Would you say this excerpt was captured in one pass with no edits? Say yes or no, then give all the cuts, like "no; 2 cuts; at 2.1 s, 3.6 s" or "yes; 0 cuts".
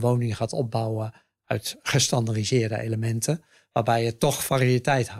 yes; 0 cuts